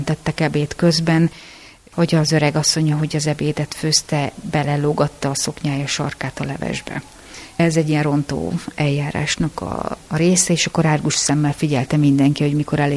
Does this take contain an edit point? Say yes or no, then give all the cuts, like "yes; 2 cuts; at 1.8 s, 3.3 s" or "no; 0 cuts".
no; 0 cuts